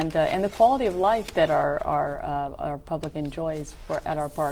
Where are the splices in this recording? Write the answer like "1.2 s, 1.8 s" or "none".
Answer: none